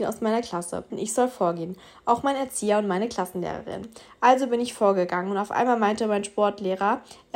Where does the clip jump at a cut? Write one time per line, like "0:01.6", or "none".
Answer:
0:00.9